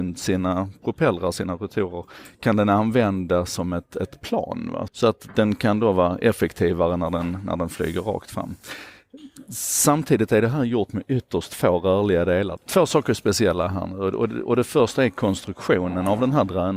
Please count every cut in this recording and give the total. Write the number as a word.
two